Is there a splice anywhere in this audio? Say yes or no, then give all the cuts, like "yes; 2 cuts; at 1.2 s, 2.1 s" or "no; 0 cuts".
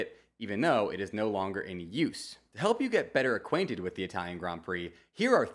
no; 0 cuts